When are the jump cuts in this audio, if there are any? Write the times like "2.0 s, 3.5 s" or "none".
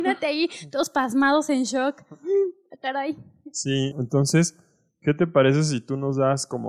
3.9 s